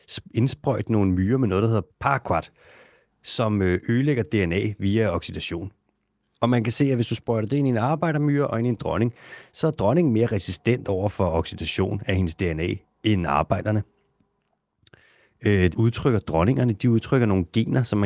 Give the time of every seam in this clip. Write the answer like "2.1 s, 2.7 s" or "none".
1.9 s, 15.7 s